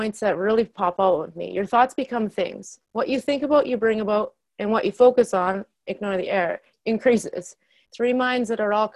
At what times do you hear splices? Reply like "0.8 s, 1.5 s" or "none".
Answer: 7.8 s